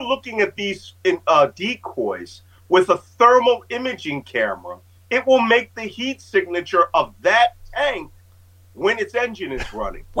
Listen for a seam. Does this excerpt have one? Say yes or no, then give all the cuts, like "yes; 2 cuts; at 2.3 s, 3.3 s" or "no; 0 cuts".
no; 0 cuts